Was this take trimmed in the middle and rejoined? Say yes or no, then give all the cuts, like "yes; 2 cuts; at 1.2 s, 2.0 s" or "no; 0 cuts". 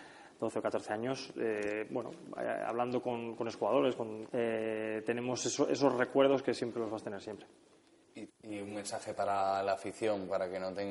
yes; 2 cuts; at 4.2 s, 8.3 s